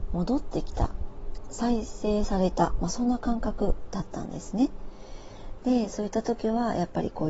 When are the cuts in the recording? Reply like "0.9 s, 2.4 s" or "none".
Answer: 5.6 s